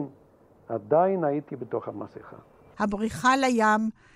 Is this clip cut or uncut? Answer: cut